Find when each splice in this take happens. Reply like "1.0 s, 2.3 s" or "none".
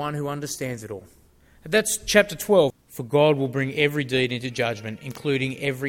2.7 s